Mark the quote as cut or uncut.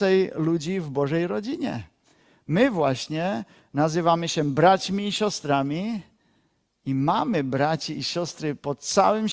uncut